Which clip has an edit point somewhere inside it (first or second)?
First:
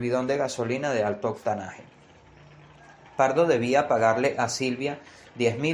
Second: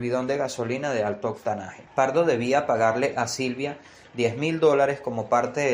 second